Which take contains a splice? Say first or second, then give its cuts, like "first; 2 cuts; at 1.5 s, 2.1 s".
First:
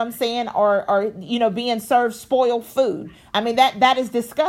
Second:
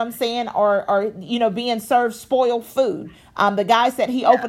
first; 1 cut; at 3.3 s